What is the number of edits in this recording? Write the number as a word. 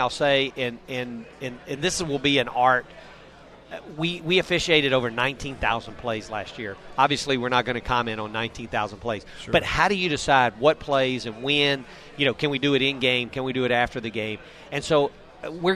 zero